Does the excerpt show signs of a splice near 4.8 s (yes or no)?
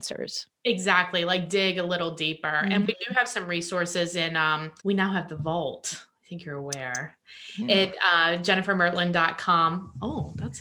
yes